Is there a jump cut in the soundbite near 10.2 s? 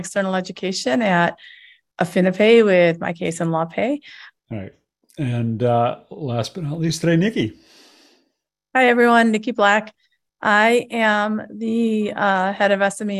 no; 1 cut; at 4.4 s

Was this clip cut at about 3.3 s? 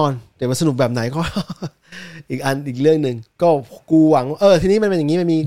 yes; 1 cut; at 3.3 s

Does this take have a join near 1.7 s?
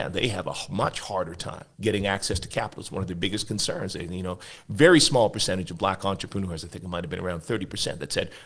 yes; 1 cut; at 1.7 s

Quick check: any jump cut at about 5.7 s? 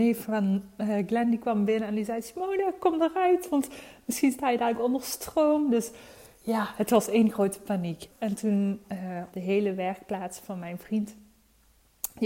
no; 2 cuts; at 8.1 s, 9.3 s

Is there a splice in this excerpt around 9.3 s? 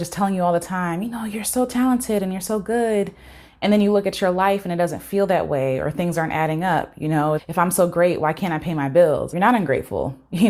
yes; 2 cuts; at 7.4 s, 9.3 s

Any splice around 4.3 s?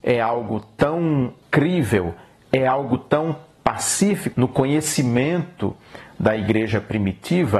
yes; 2 cuts; at 1.4 s, 4.3 s

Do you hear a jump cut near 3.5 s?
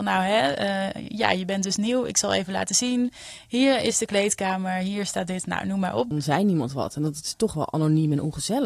no; 1 cut; at 6.1 s

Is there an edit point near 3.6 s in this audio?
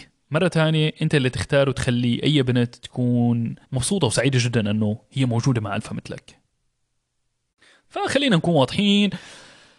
yes; 1 cut; at 3.6 s

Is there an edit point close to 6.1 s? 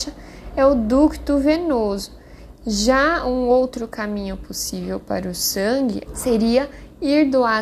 yes; 2 cuts; at 2.5 s, 6.1 s

